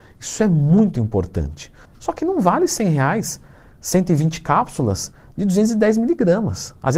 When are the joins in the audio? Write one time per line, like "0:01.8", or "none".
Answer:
0:01.8

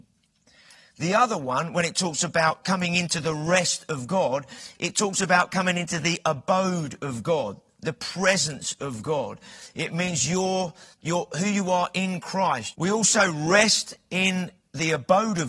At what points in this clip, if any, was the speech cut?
0:09.7
0:12.7

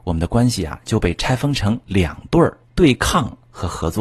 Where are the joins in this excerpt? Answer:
0:02.6

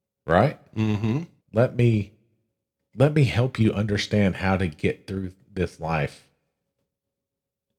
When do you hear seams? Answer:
0:01.4

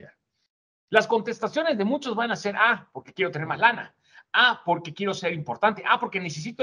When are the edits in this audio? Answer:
none

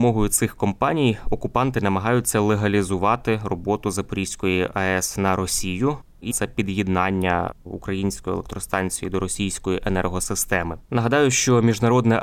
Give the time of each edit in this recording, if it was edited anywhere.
0:06.3
0:10.9

